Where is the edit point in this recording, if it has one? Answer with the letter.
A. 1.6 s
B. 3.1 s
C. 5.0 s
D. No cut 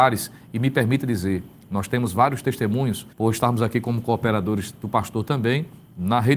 B